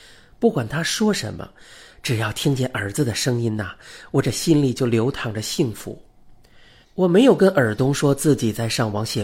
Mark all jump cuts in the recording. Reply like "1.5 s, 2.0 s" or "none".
6.8 s